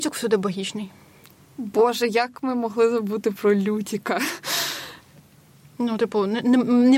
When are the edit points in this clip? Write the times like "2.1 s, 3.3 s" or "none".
none